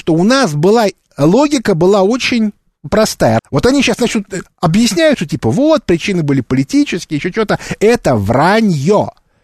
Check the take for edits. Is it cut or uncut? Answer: cut